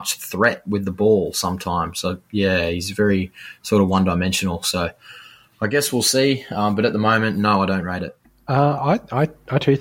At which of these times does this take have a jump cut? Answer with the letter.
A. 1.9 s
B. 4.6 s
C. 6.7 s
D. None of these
D